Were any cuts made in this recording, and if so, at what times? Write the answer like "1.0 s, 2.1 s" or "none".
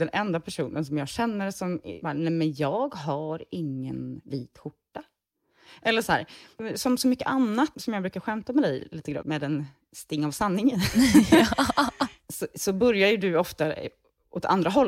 7.7 s, 9.2 s